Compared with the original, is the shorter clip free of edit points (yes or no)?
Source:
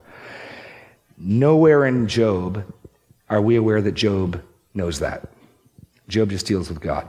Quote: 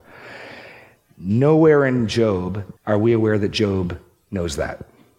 no